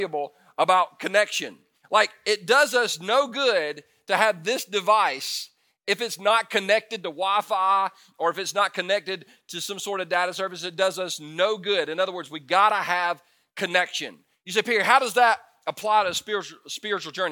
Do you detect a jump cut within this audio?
no; 0 cuts

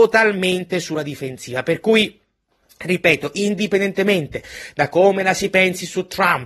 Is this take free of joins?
yes; 0 cuts

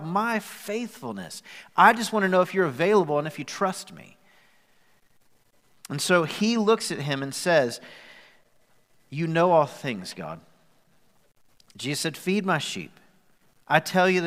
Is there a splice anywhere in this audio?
no; 0 cuts

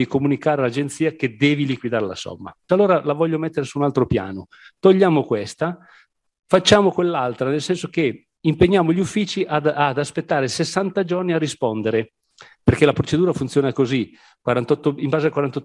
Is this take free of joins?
no; 1 cut; at 2.7 s

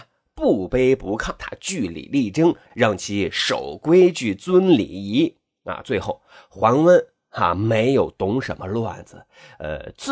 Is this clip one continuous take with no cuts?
no; 1 cut; at 1.4 s

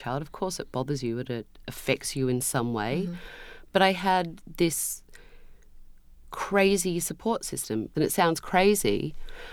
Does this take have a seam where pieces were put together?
yes; 1 cut; at 7.9 s

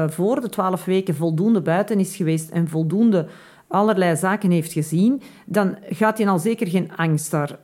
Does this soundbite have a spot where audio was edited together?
no; 0 cuts

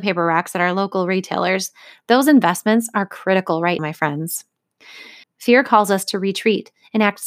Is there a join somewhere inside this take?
yes; 2 cuts; at 3.8 s, 5.2 s

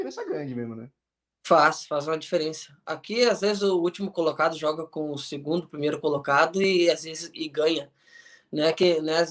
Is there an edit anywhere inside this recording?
no; 0 cuts

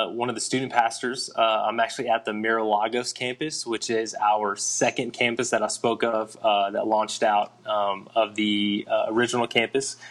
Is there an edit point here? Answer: no; 0 cuts

